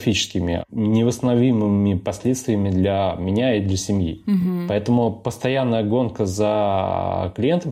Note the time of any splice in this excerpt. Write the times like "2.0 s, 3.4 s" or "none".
none